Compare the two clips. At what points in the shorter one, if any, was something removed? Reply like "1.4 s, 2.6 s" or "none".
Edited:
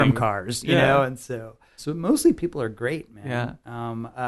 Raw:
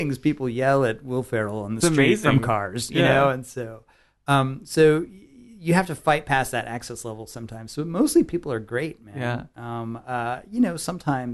1.8 s